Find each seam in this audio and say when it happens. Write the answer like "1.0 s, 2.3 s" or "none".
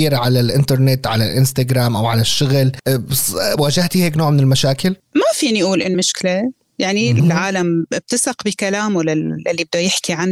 5.9 s, 7.2 s